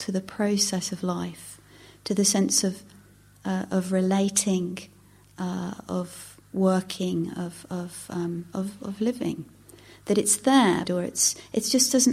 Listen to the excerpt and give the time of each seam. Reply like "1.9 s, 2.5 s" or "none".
10.9 s